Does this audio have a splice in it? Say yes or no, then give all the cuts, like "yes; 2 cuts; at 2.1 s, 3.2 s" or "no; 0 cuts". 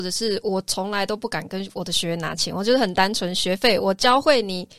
no; 0 cuts